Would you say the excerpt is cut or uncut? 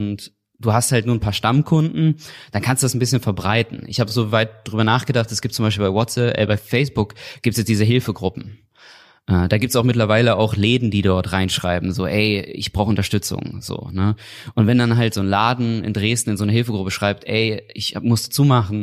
uncut